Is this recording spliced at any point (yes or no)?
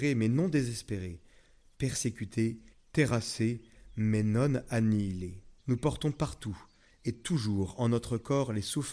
yes